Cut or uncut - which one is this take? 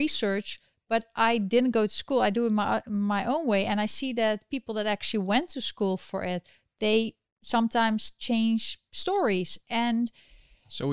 uncut